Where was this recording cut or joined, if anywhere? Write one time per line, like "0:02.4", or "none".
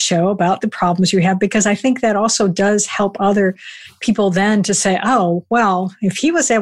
none